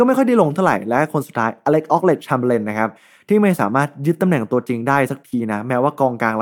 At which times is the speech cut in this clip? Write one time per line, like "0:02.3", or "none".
none

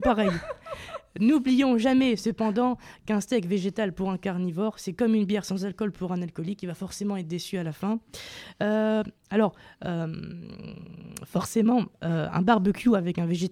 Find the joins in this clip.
none

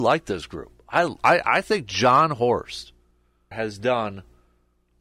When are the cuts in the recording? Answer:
0:03.5

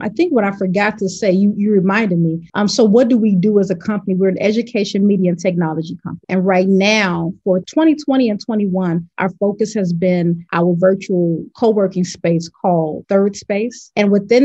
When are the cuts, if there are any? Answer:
none

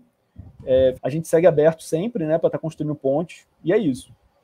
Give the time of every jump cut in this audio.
0:01.0
0:02.4

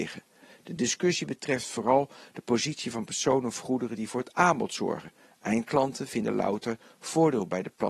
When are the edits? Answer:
none

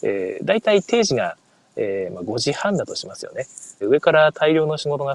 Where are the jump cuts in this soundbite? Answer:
0:03.8

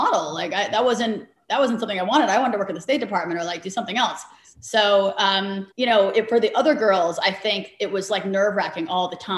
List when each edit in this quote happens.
0:05.7

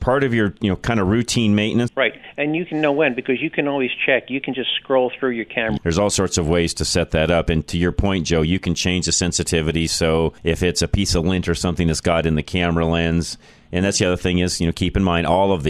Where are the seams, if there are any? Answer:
0:01.9
0:05.8
0:10.4

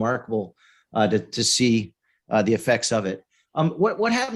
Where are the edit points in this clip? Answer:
none

